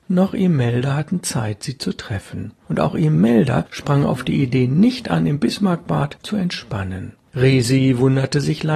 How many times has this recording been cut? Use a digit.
1